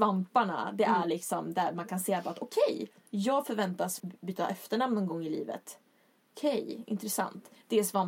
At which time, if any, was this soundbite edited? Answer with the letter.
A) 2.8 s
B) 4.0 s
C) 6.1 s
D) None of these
B